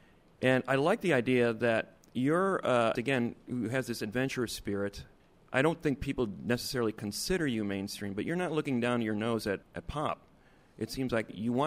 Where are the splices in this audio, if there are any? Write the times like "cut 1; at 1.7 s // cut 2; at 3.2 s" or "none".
cut 1; at 3.0 s